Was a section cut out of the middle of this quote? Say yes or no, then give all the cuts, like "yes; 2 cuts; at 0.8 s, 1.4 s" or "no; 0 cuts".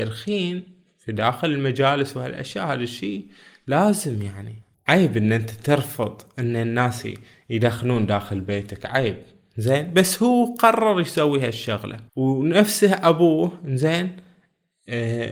yes; 1 cut; at 12.1 s